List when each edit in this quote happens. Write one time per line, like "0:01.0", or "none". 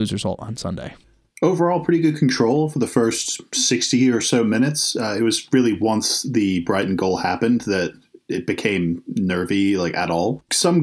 none